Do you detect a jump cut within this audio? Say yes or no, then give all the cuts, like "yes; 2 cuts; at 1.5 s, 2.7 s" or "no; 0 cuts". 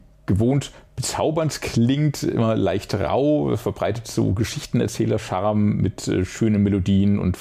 no; 0 cuts